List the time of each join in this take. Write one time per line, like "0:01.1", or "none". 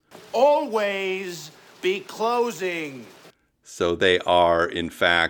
none